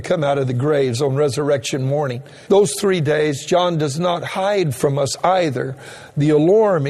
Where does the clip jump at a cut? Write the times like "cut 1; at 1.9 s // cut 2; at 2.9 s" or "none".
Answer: cut 1; at 2.5 s